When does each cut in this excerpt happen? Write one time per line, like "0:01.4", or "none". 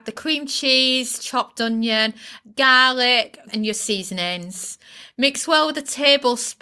0:03.5